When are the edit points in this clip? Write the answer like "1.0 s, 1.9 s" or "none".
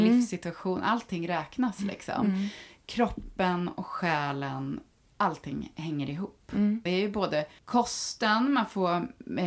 6.9 s